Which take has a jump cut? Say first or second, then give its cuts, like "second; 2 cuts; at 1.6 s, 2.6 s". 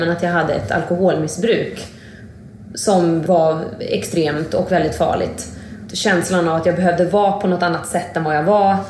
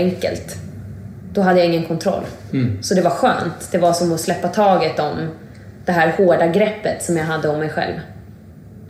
first; 1 cut; at 5.9 s